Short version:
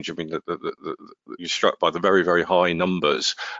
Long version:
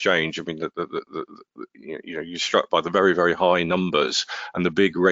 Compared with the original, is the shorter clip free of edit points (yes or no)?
no